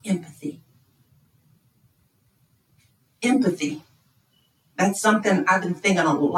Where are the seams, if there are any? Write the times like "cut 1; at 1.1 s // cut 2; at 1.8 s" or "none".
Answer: none